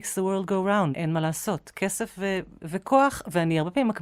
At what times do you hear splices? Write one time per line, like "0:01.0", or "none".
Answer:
0:00.9
0:02.6